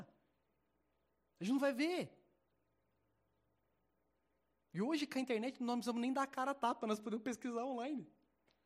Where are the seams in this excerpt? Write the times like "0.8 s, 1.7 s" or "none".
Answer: none